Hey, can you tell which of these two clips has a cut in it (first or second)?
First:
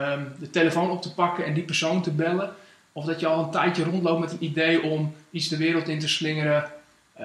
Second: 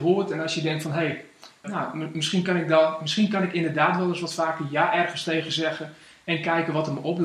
second